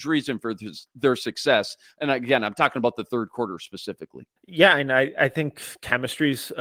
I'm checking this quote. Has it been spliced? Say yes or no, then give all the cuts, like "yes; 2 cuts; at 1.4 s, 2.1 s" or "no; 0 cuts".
yes; 1 cut; at 4.4 s